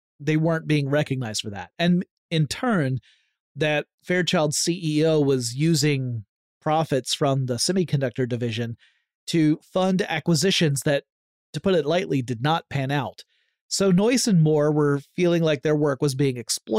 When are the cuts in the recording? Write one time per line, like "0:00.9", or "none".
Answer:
none

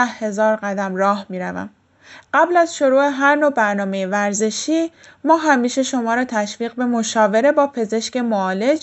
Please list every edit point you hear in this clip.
0:02.2

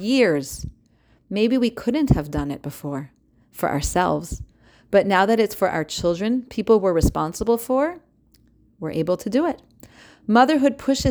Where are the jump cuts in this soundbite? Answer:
none

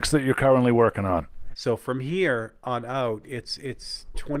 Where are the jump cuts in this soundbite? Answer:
0:01.5

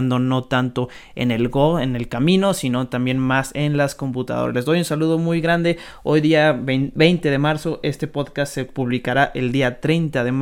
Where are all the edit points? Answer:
none

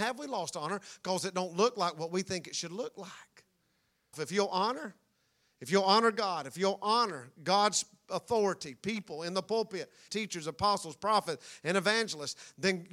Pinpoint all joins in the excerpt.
0:04.1
0:10.1

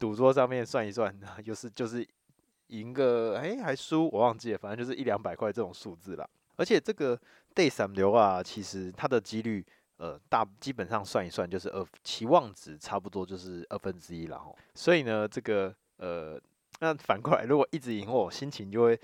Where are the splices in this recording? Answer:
0:16.7

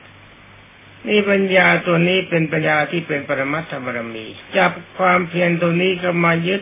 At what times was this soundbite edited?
0:02.6
0:04.5

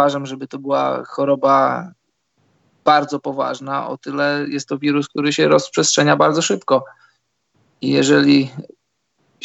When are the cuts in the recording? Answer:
none

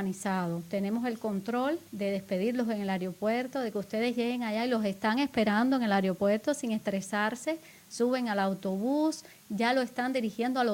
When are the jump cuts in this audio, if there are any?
0:01.9

